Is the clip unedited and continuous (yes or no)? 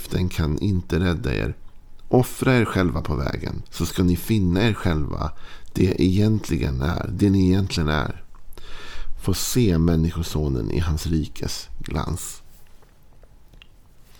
no